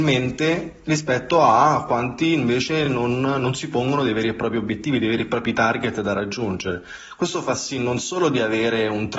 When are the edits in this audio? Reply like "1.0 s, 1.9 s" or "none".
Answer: none